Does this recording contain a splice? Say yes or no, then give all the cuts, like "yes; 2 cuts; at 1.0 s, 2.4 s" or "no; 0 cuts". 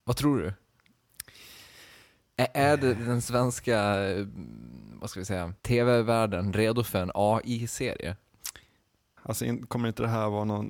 yes; 2 cuts; at 5.6 s, 9.2 s